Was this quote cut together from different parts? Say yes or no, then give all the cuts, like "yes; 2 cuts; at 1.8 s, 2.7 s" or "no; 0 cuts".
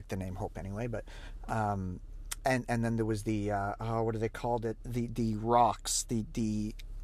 no; 0 cuts